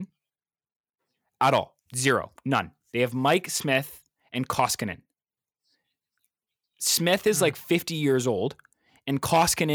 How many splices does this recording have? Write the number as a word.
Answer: one